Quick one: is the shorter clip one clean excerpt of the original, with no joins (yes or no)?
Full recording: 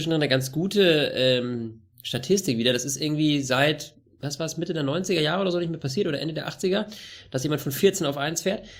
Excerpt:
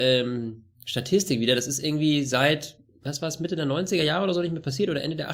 yes